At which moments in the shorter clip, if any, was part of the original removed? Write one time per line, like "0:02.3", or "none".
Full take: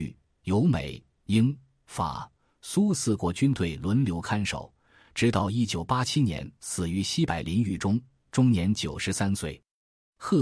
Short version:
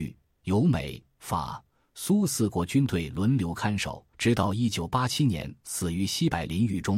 0:01.1
0:04.1